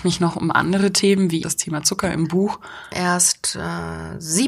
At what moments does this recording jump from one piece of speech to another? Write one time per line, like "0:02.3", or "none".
0:01.4
0:02.9